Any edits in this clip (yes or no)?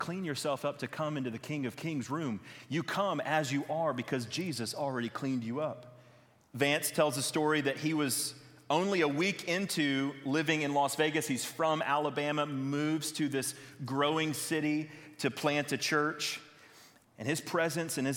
yes